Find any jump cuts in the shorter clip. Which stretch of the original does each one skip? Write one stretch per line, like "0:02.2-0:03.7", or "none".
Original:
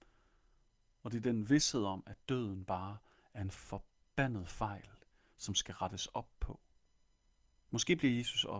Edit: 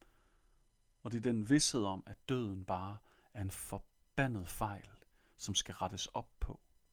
none